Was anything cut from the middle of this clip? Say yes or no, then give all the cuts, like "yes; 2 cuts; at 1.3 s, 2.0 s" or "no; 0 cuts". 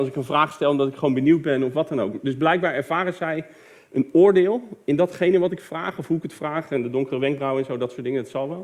no; 0 cuts